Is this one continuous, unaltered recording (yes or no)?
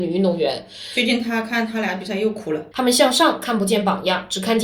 no